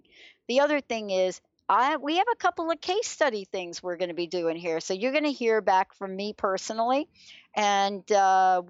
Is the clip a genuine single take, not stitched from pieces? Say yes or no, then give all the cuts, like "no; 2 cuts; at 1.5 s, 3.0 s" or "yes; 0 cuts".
yes; 0 cuts